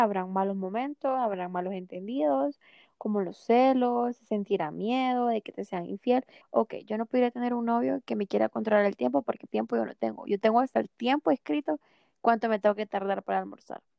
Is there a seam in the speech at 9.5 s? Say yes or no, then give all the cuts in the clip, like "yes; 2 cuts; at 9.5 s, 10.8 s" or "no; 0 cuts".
yes; 2 cuts; at 6.4 s, 9.5 s